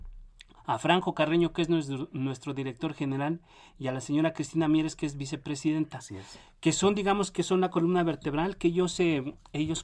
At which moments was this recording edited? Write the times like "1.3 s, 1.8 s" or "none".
none